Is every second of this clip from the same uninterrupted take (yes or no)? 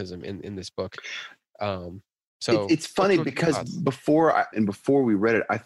no